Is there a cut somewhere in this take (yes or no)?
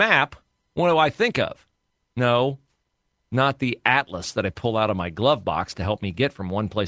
no